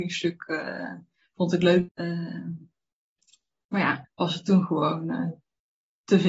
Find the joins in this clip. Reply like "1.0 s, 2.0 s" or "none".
1.9 s, 4.0 s

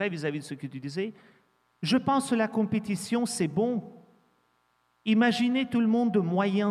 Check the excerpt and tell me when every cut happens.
none

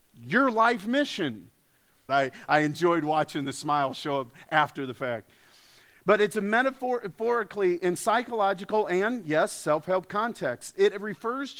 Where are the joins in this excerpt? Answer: 2.1 s

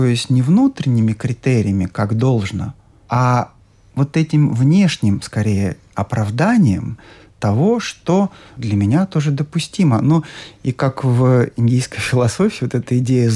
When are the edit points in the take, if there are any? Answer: none

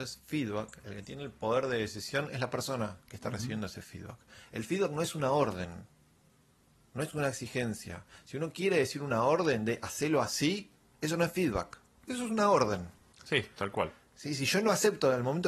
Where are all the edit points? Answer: none

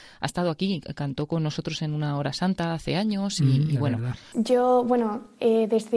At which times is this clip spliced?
4.3 s

